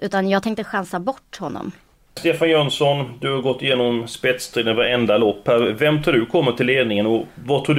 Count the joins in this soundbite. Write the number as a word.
one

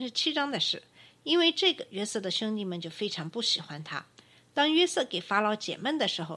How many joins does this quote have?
zero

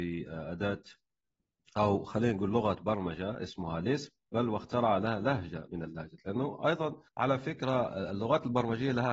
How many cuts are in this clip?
one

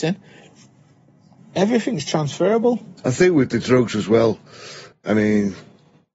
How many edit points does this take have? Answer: two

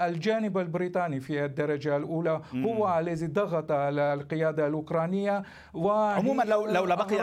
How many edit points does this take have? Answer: zero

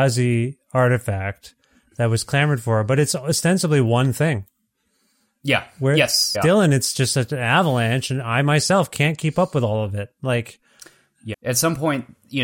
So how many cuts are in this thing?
two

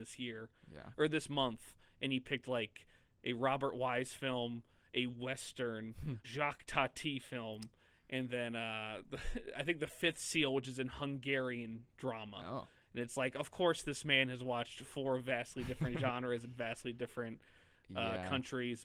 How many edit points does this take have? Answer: one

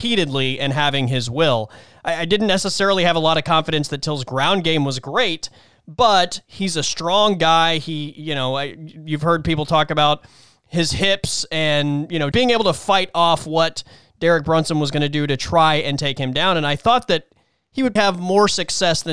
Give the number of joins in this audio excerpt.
two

